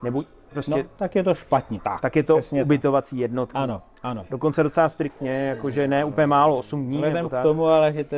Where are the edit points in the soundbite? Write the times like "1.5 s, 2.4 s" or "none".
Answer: 1.8 s, 3.5 s